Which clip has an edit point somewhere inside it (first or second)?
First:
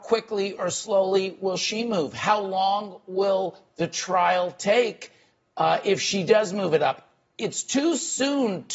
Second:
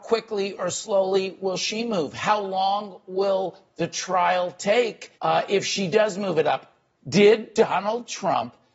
second